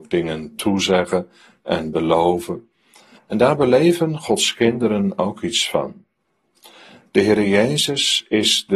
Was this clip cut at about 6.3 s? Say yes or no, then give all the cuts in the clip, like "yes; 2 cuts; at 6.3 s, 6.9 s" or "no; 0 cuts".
no; 1 cut; at 3.2 s